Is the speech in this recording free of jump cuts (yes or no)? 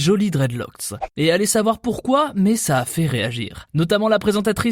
yes